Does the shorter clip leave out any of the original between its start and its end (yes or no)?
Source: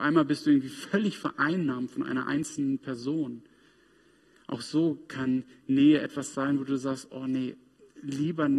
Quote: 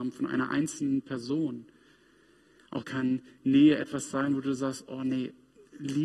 yes